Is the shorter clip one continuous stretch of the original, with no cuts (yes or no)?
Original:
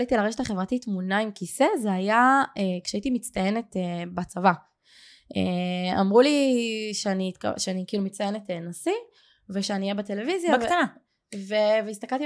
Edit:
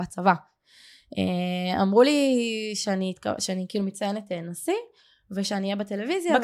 yes